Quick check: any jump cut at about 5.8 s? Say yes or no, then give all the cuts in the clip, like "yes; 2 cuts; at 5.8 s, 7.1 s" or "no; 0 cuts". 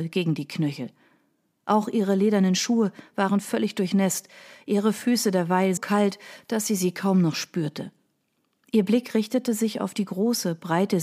yes; 1 cut; at 5.8 s